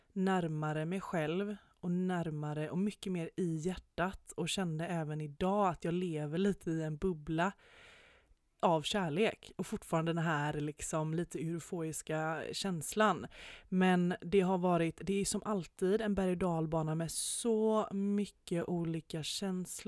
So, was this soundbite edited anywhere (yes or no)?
no